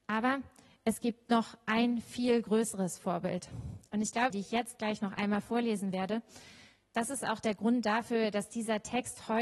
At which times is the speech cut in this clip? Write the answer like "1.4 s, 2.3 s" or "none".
4.3 s